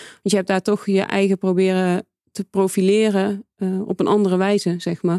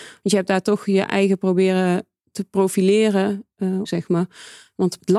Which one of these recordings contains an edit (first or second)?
second